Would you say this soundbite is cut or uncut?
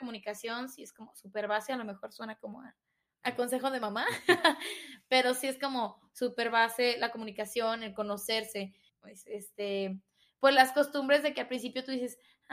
cut